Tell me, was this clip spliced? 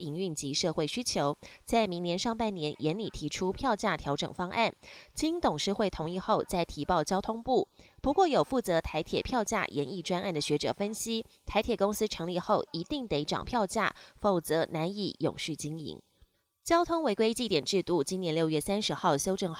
no; 0 cuts

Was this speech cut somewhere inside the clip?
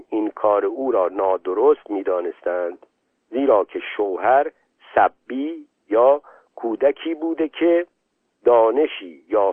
no; 0 cuts

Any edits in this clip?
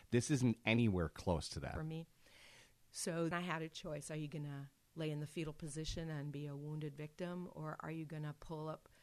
yes; 2 cuts; at 1.8 s, 3.3 s

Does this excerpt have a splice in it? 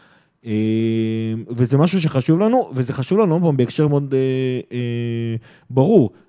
yes; 1 cut; at 3.9 s

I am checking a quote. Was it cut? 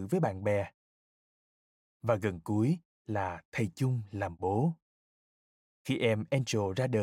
no; 0 cuts

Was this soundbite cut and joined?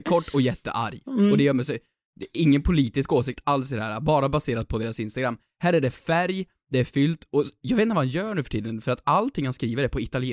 no; 0 cuts

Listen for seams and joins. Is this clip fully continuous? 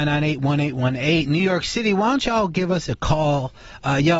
yes; 0 cuts

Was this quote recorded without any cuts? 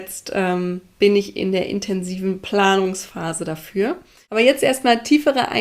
yes; 0 cuts

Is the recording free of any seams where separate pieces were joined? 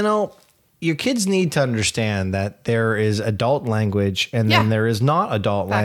yes; 0 cuts

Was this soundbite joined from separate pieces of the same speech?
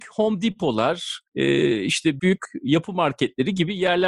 yes; 1 cut; at 2.2 s

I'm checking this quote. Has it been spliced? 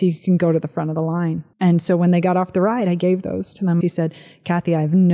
yes; 2 cuts; at 1.5 s, 3.8 s

